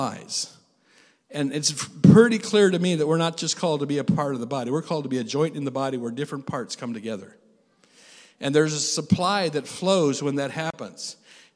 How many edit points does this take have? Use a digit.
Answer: 0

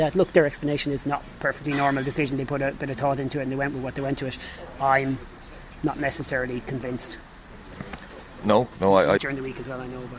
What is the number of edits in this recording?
1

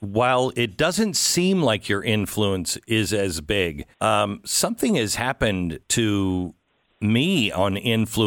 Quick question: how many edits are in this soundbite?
2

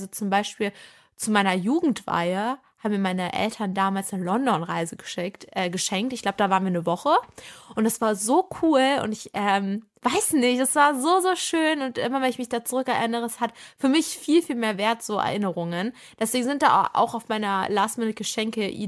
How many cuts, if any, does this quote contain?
0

